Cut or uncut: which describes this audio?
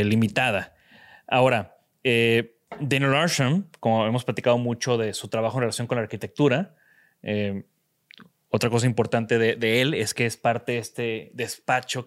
cut